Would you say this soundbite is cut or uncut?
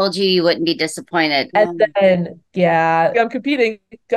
cut